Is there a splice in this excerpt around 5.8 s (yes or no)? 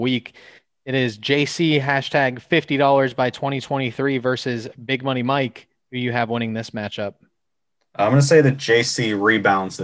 no